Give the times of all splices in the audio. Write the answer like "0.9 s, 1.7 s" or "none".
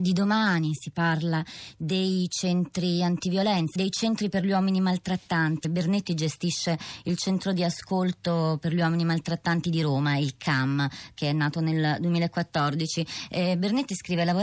3.8 s, 5.6 s